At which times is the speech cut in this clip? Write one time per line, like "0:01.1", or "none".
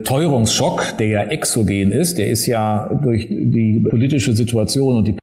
0:03.9